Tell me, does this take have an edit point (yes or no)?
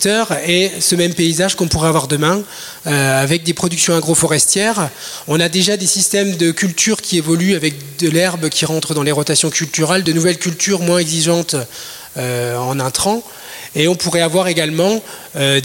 no